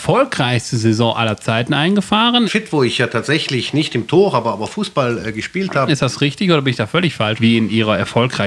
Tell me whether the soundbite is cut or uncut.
cut